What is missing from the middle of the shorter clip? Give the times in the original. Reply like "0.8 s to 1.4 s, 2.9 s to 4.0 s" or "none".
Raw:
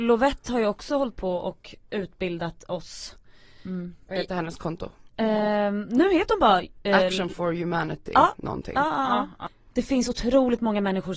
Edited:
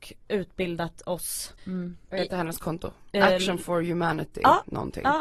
3.2 s to 3.6 s, 5.1 s to 6.8 s